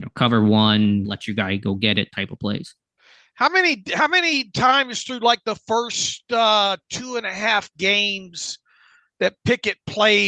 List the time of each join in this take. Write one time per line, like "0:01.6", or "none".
0:01.0